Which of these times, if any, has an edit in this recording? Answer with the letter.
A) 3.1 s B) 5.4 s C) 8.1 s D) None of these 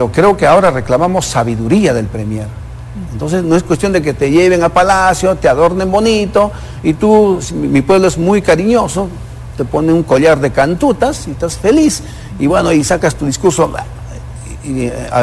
A